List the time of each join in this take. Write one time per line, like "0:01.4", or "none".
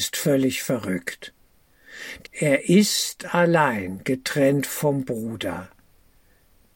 0:02.2